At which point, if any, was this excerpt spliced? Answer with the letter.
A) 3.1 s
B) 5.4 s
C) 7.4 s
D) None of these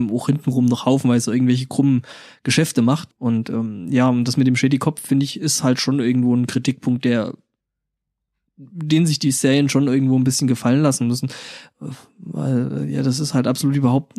A